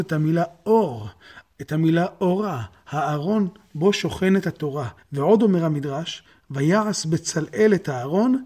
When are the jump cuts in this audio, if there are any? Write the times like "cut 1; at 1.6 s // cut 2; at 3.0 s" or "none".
cut 1; at 5.0 s